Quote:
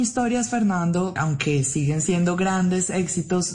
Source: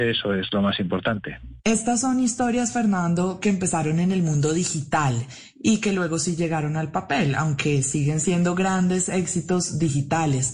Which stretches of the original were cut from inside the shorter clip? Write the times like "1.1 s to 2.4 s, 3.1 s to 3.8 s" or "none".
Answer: 3.4 s to 7.3 s

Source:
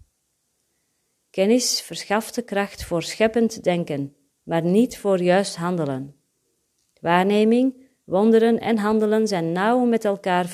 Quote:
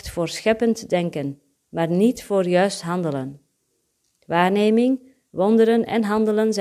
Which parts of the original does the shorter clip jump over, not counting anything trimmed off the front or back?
none

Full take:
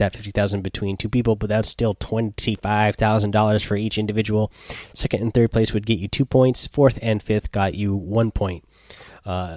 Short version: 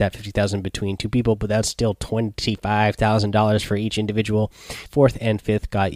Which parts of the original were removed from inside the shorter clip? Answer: 4.9 s to 6.7 s

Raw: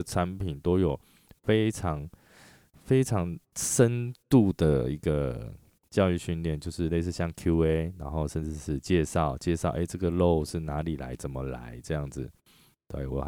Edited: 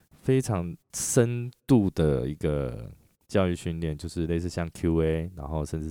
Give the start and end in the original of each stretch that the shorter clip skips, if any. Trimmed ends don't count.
none

